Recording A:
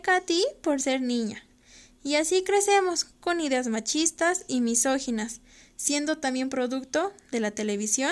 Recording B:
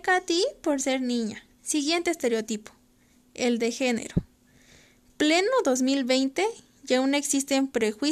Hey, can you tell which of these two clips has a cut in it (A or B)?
B